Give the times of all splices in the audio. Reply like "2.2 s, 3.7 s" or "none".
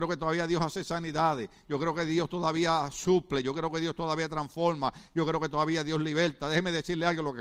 none